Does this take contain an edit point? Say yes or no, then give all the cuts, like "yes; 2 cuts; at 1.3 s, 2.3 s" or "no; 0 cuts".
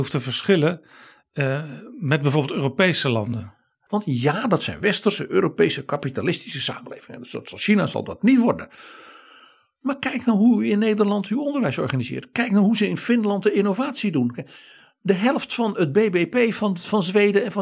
yes; 1 cut; at 3.9 s